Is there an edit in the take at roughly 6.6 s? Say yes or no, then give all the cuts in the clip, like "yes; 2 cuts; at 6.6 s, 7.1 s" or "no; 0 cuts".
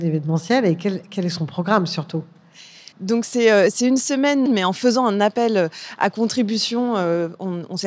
no; 2 cuts; at 2.9 s, 4.5 s